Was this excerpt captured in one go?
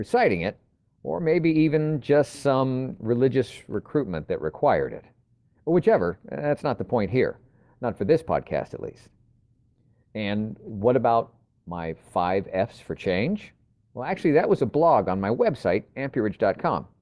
yes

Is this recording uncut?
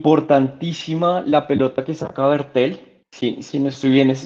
no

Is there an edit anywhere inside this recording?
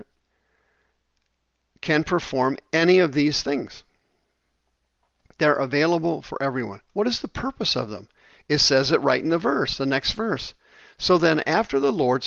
no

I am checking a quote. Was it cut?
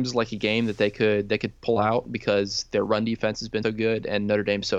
yes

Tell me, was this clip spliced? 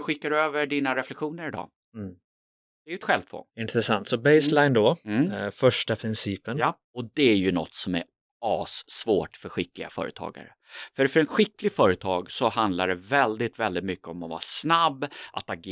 yes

